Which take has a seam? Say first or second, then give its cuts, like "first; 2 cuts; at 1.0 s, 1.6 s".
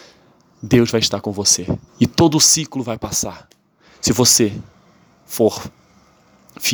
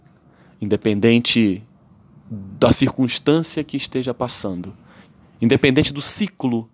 first; 2 cuts; at 1.9 s, 3.9 s